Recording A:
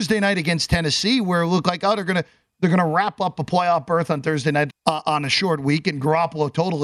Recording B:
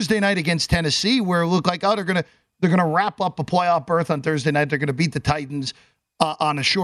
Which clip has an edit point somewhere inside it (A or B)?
A